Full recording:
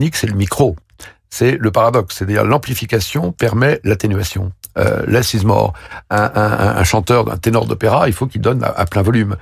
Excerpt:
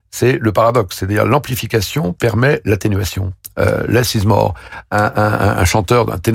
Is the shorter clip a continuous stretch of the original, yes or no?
yes